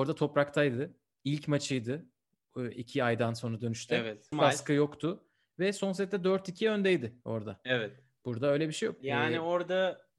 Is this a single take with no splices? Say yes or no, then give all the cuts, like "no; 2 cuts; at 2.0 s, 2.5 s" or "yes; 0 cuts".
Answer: no; 2 cuts; at 4.3 s, 9.0 s